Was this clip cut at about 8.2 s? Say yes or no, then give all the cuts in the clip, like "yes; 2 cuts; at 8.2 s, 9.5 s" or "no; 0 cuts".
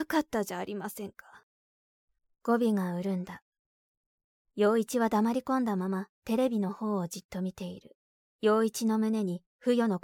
yes; 1 cut; at 8.2 s